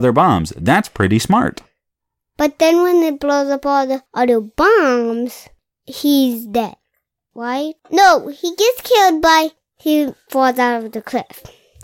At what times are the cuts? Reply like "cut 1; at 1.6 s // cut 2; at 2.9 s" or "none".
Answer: cut 1; at 7.8 s